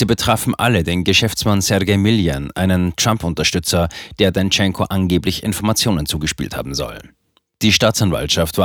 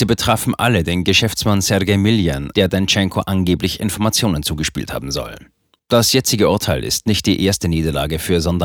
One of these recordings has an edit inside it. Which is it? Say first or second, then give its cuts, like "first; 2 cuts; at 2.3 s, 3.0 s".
second; 2 cuts; at 2.5 s, 5.8 s